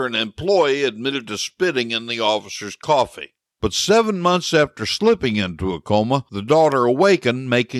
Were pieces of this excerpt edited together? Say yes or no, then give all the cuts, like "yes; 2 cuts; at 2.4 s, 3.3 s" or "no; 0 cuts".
yes; 1 cut; at 3.5 s